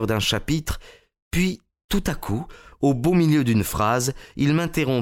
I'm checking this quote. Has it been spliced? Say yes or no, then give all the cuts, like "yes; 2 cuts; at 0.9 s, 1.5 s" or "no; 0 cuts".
no; 0 cuts